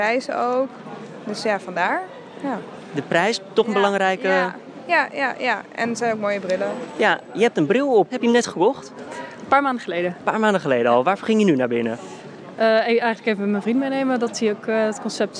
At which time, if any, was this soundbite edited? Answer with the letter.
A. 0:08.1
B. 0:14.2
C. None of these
A